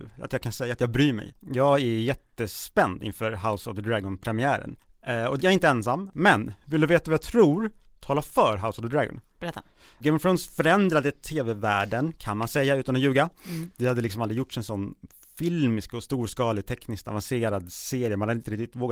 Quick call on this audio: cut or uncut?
cut